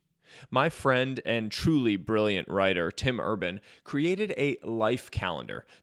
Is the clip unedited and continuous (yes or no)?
yes